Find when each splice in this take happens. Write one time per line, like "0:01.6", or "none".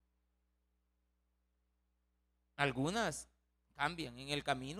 none